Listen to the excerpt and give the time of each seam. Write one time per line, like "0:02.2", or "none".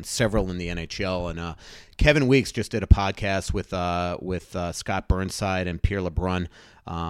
none